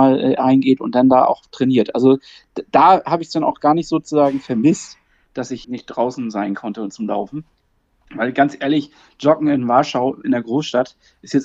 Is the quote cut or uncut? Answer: cut